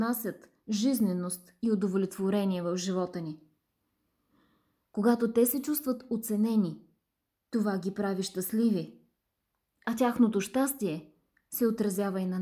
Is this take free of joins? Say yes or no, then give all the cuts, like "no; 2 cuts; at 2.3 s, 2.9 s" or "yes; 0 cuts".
yes; 0 cuts